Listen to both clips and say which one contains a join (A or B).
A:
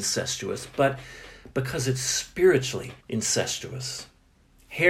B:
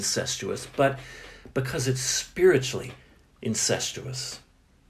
A